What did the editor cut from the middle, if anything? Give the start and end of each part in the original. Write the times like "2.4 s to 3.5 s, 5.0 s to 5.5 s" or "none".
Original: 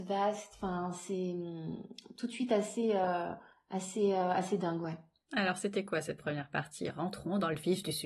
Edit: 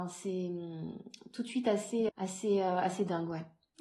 2.9 s to 3.6 s